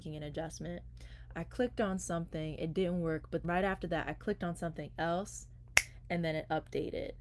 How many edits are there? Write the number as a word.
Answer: one